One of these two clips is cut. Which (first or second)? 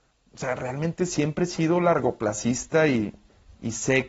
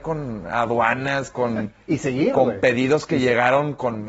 second